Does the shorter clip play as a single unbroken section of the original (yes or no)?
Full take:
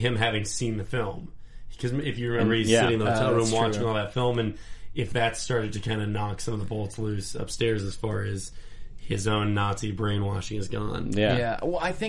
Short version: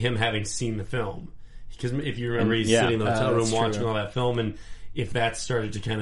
yes